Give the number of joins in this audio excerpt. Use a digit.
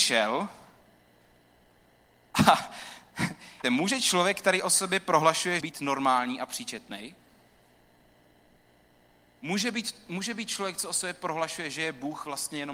2